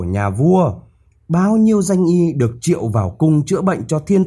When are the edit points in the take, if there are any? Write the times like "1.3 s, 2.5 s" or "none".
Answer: 1.1 s